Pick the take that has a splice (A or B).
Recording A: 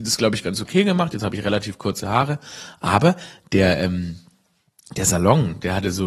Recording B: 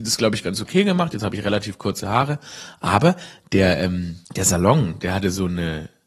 B